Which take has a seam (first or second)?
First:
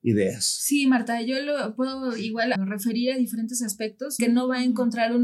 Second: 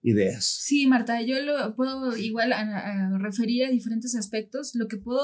first